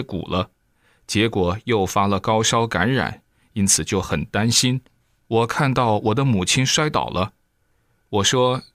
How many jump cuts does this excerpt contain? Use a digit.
1